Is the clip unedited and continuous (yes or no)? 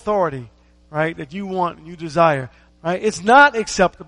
no